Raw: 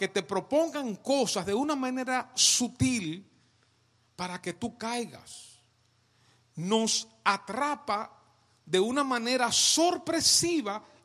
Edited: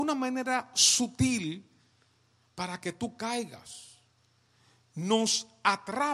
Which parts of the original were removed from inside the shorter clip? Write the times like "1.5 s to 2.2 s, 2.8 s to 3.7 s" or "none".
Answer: none